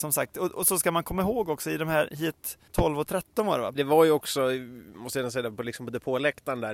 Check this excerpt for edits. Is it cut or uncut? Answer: cut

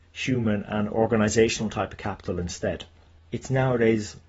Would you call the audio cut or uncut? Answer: cut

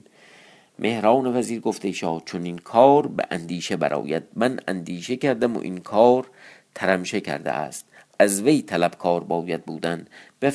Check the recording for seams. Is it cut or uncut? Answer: uncut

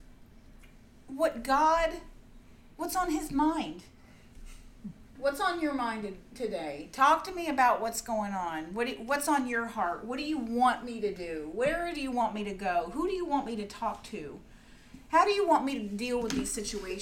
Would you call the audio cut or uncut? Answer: cut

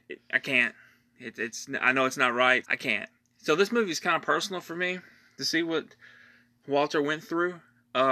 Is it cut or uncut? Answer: cut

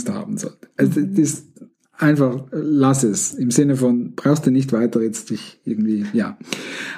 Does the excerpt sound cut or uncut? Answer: uncut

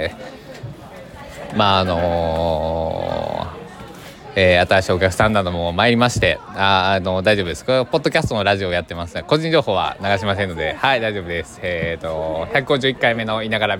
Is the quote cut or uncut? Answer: uncut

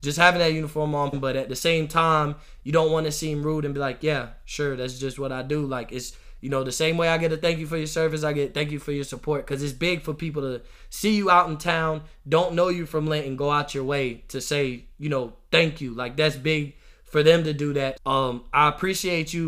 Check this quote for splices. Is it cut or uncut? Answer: cut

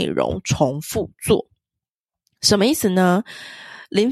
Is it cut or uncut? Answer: uncut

